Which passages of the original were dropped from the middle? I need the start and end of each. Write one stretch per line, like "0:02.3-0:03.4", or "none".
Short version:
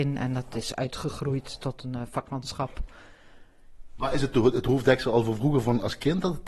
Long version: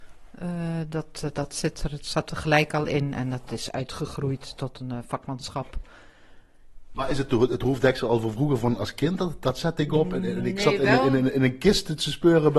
none